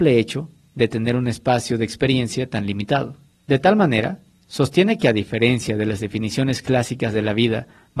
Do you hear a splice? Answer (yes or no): no